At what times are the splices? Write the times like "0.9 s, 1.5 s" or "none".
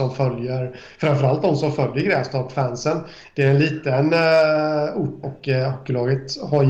5.2 s

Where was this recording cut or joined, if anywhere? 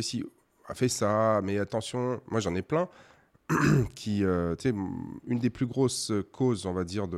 none

